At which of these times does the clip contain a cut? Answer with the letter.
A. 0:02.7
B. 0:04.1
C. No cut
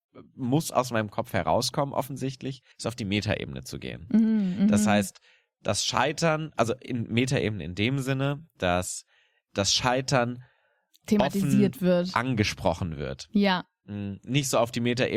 A